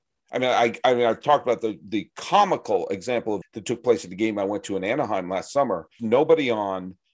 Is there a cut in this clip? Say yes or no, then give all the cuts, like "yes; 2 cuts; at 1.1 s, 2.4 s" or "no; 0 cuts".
yes; 2 cuts; at 3.4 s, 6.0 s